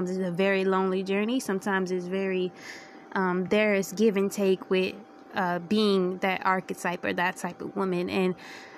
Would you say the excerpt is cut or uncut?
uncut